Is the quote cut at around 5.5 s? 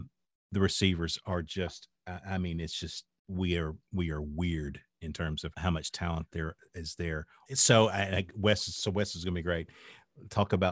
yes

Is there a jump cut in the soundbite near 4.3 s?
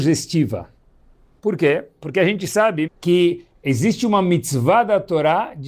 no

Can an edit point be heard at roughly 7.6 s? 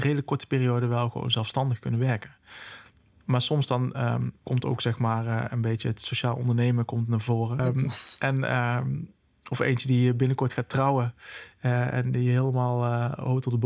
yes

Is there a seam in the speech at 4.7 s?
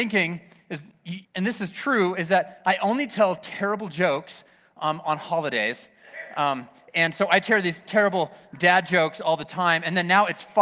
no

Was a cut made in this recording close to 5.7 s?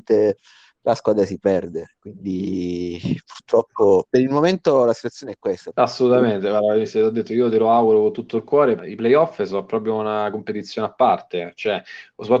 yes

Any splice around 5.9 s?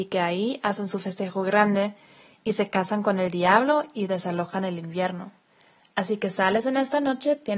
no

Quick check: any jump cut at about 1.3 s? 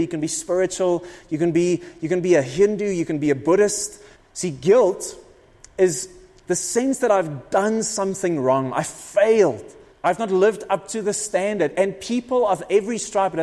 no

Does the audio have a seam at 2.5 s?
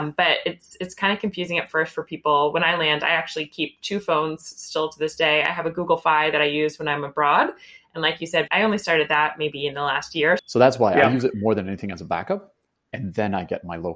no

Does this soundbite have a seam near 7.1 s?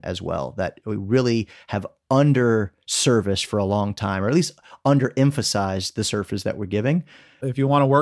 no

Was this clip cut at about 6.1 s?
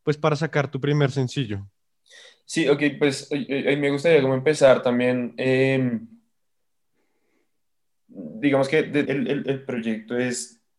no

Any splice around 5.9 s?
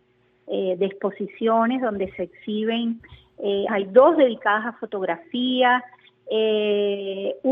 no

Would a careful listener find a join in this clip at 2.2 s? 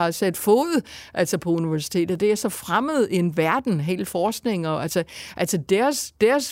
no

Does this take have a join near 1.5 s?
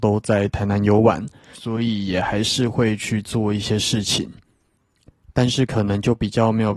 yes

